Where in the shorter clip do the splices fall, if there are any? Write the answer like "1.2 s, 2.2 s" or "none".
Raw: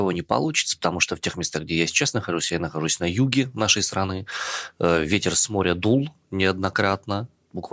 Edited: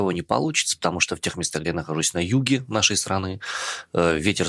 1.6 s